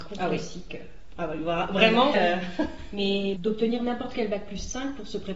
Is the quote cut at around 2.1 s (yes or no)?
yes